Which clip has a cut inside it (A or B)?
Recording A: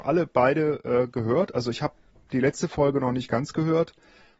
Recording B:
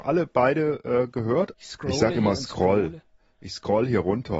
B